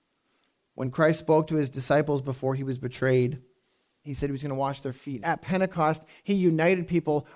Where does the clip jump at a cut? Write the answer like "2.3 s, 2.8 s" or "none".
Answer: 4.0 s, 5.2 s